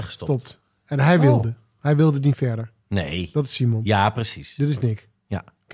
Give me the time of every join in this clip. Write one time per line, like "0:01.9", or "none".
none